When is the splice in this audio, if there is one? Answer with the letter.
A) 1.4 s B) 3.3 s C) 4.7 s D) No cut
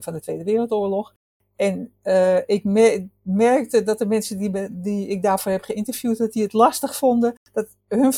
D